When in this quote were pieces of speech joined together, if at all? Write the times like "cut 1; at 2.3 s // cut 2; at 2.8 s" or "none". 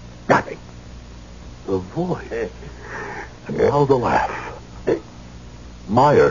cut 1; at 1.6 s